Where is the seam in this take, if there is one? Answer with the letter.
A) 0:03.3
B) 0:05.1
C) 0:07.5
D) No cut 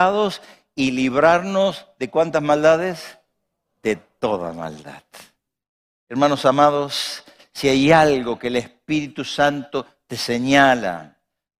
D